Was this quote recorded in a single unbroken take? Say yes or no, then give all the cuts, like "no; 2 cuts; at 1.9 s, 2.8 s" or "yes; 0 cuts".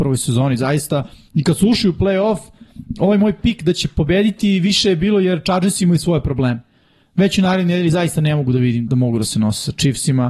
no; 1 cut; at 8.9 s